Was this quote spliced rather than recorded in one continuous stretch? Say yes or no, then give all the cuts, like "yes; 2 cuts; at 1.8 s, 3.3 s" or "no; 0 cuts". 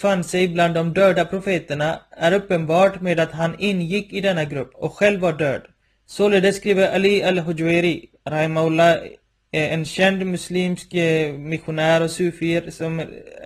yes; 1 cut; at 5.9 s